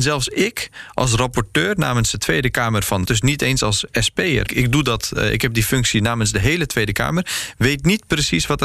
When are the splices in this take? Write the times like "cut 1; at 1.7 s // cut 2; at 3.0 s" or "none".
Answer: cut 1; at 3.1 s // cut 2; at 4.5 s